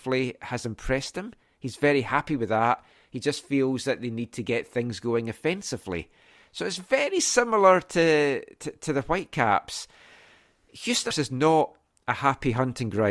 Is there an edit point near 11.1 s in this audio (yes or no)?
yes